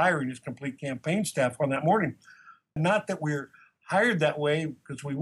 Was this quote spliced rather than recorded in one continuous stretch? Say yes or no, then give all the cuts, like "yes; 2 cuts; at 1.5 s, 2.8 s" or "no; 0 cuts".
yes; 1 cut; at 2.8 s